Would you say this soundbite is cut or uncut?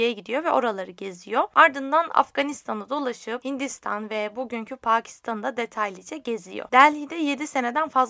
uncut